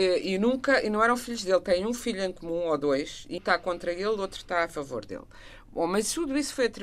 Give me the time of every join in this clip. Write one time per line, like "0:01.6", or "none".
0:03.4